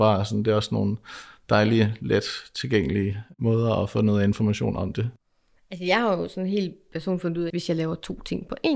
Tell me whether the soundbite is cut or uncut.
cut